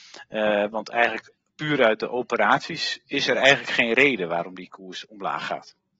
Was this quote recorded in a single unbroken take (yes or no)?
no